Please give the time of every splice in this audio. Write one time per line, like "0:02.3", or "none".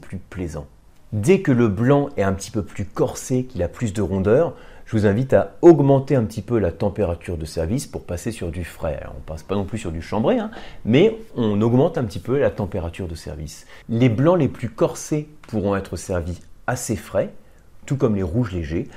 0:13.8
0:17.8